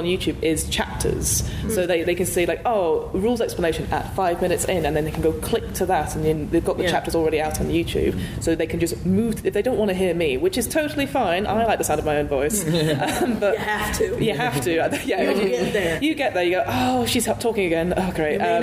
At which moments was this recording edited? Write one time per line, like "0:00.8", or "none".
none